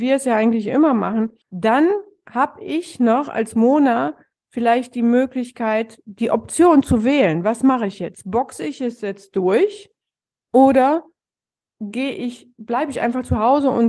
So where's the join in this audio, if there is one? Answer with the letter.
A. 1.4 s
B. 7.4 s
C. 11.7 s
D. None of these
A